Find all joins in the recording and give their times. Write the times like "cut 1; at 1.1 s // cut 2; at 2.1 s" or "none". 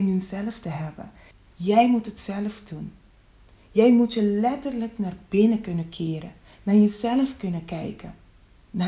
cut 1; at 1.3 s